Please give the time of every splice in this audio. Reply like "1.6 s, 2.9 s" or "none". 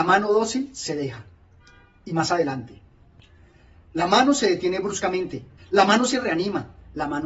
5.6 s